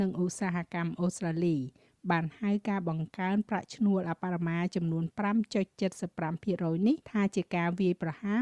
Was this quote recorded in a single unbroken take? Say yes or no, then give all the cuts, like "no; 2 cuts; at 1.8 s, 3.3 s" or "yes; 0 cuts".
no; 2 cuts; at 4.2 s, 7.0 s